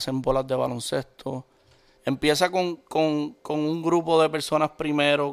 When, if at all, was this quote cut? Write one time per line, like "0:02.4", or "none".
0:02.0